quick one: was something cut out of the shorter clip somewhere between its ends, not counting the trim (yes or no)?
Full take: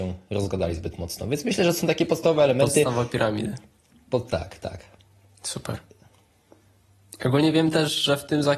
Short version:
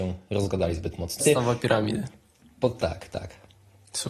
yes